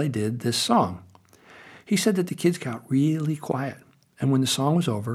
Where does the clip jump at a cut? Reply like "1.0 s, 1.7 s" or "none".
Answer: none